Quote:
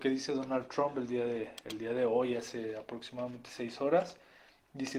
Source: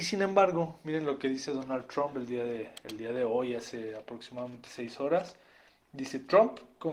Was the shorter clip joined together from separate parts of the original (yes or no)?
no